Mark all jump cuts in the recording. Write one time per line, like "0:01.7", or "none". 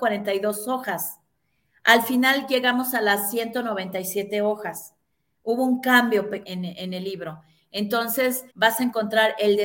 0:06.4
0:08.5